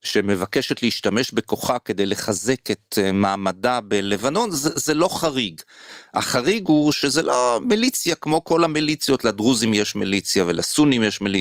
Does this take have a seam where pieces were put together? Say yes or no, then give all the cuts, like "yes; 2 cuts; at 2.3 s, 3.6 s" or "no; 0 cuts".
no; 0 cuts